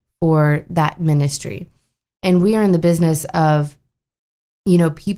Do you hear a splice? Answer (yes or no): no